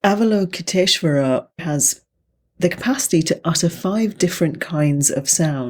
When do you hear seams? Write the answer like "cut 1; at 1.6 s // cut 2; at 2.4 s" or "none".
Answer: none

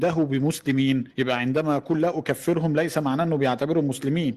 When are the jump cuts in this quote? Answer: cut 1; at 1.1 s

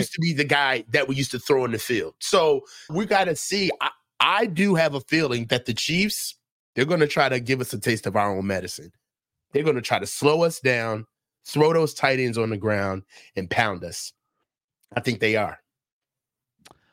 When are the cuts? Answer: cut 1; at 2.9 s

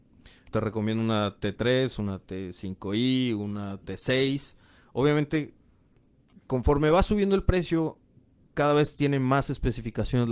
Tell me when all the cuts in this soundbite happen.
none

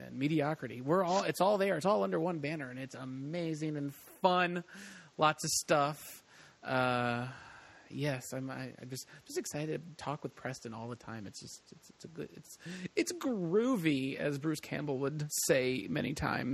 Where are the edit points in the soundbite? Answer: none

